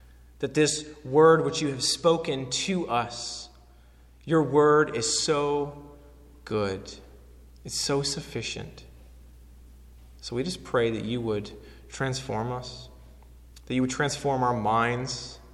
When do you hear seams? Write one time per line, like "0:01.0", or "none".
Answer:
none